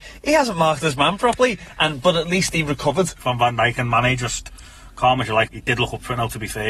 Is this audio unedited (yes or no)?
no